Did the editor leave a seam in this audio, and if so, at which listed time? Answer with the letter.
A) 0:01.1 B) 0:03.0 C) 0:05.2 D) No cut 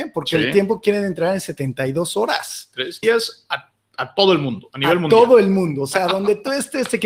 B